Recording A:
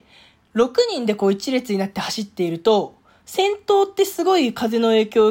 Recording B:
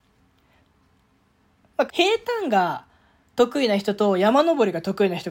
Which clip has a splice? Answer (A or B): B